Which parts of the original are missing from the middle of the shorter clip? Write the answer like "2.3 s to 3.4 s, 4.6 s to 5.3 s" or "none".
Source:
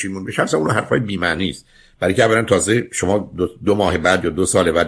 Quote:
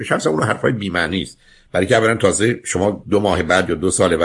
3.3 s to 3.6 s